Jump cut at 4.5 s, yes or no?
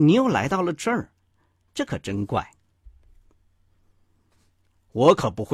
no